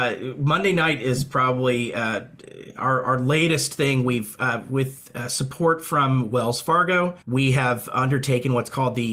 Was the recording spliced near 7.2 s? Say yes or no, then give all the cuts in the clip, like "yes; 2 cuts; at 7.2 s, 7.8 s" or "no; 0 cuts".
yes; 1 cut; at 7.2 s